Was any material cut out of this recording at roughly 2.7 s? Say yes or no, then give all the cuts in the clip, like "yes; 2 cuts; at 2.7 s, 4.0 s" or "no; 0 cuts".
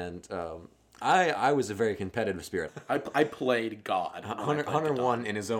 yes; 1 cut; at 2.7 s